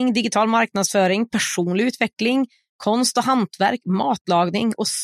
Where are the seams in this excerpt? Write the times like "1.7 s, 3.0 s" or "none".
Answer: none